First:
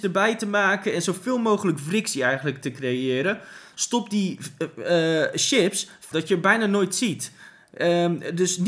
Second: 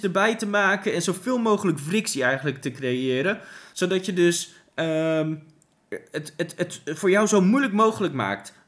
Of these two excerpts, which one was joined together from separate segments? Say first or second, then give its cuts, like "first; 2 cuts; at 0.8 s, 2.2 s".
first; 2 cuts; at 3.7 s, 6.1 s